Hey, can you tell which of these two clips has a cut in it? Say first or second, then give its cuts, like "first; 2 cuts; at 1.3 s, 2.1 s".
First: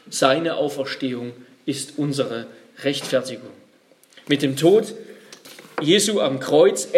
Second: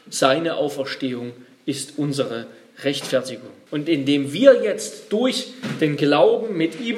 second; 1 cut; at 3.7 s